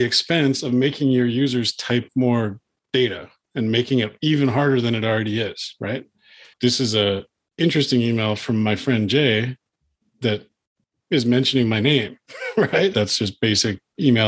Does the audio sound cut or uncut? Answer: cut